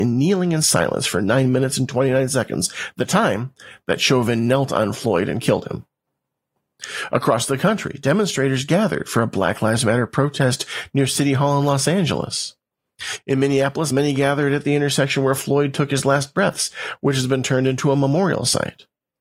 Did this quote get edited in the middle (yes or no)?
no